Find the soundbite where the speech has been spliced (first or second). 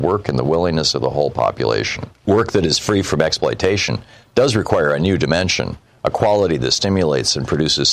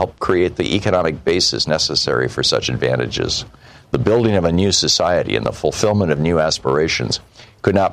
first